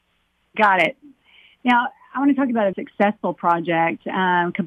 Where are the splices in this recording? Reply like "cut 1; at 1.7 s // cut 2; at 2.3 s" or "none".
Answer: cut 1; at 2.7 s